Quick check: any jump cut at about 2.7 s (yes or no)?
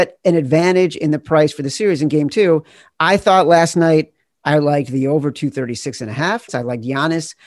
no